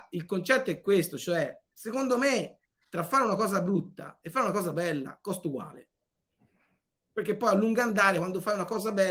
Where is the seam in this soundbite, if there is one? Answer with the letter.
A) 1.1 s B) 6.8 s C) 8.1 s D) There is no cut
D